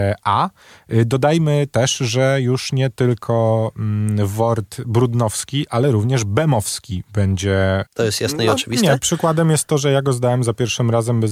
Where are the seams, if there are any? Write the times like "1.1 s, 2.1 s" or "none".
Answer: 7.9 s